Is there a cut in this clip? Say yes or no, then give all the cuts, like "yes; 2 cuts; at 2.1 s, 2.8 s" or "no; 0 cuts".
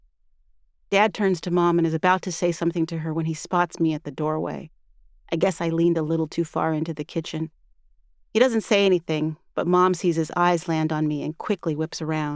no; 0 cuts